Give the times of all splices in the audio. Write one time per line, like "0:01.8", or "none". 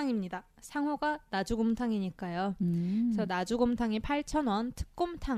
none